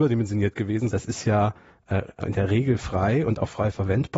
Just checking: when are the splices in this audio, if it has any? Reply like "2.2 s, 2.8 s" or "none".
0.9 s